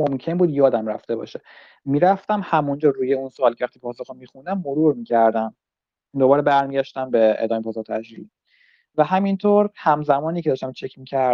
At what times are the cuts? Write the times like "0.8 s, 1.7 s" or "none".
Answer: none